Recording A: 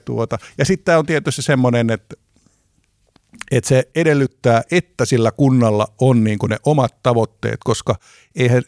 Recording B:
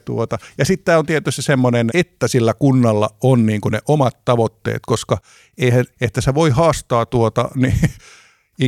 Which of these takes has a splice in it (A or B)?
B